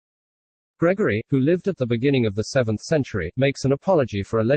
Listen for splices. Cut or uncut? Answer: cut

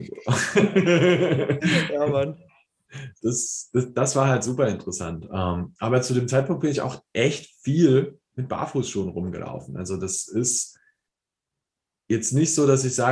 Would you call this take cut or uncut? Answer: uncut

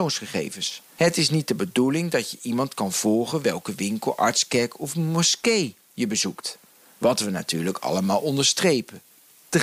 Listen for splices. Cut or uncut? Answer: cut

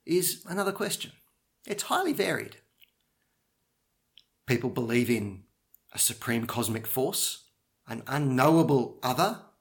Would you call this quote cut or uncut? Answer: cut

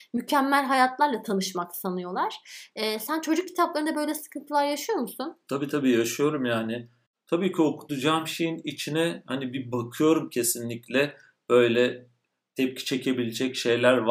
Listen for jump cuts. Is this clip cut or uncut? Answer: uncut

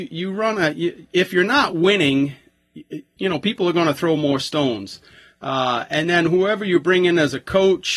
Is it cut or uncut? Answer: uncut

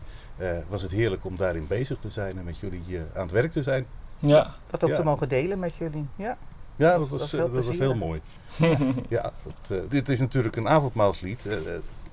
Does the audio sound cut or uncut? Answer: cut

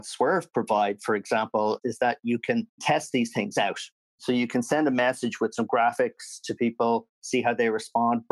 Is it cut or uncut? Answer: cut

